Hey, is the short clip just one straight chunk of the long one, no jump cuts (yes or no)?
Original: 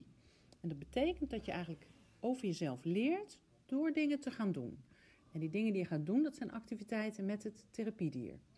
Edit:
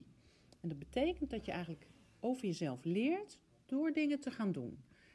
yes